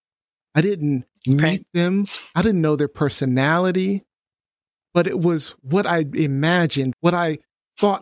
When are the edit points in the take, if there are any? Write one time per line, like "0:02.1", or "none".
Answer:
0:06.9